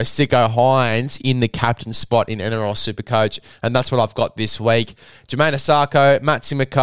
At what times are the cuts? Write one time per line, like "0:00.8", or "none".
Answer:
0:05.1